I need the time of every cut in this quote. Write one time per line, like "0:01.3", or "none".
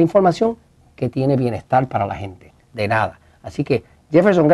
0:02.7